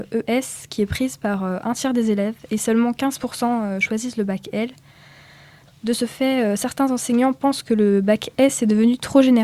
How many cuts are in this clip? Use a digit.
0